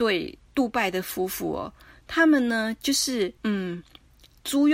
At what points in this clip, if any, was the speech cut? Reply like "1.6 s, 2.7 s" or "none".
3.4 s